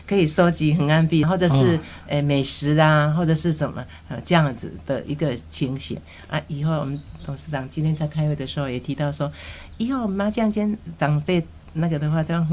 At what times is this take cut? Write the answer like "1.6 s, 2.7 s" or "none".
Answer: 1.2 s